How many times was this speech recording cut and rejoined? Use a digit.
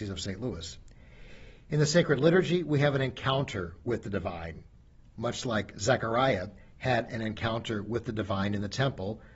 0